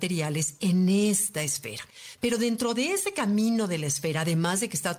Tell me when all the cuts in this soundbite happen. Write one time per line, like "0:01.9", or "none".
none